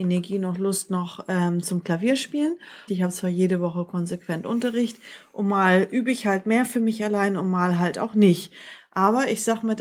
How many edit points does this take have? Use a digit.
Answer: 1